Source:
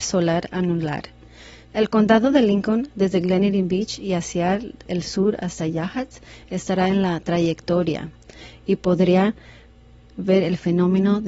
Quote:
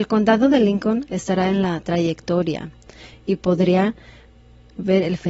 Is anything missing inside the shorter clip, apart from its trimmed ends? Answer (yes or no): yes